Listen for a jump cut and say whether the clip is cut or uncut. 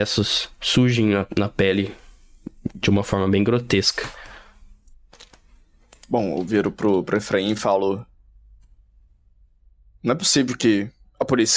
uncut